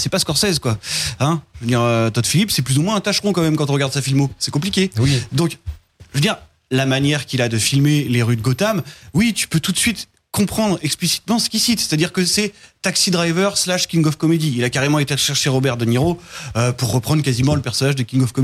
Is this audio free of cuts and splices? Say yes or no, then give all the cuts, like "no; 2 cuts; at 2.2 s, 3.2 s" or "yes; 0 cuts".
yes; 0 cuts